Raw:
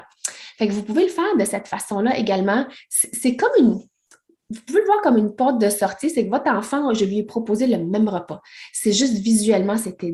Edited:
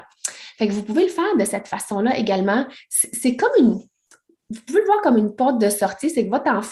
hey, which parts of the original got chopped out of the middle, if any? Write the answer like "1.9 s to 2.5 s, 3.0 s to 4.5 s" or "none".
none

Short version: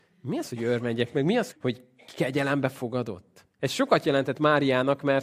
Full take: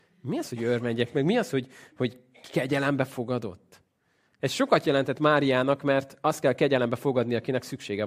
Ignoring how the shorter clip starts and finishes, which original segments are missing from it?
1.5 s to 1.9 s, 3.9 s to 4.3 s

